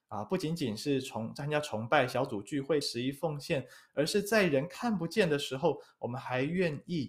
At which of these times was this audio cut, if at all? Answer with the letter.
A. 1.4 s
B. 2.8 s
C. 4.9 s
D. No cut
B